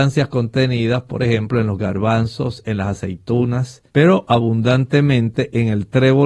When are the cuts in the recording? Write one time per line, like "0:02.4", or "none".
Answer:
0:03.9